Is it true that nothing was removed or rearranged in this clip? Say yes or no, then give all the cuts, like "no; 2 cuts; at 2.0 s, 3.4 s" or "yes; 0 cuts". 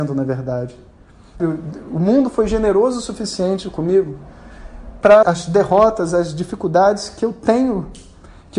no; 2 cuts; at 1.4 s, 5.2 s